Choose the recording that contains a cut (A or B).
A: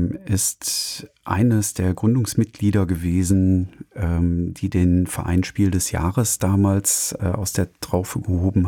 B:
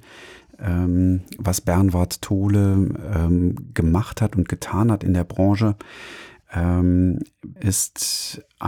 B